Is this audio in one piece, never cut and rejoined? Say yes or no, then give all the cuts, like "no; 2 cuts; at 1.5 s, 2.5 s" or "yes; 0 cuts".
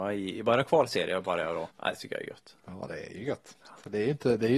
no; 1 cut; at 1.7 s